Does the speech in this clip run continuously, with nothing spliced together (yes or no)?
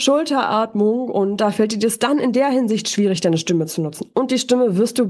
yes